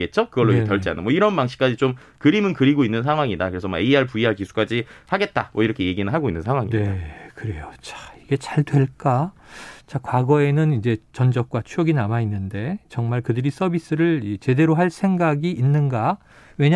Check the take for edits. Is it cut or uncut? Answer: uncut